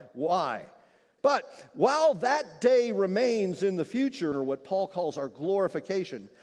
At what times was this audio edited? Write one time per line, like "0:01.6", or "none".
0:01.2
0:04.3